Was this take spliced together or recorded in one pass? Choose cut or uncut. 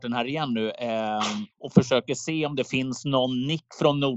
cut